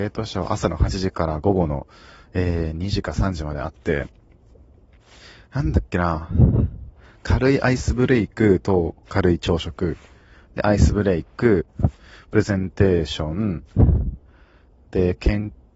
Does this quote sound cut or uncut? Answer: uncut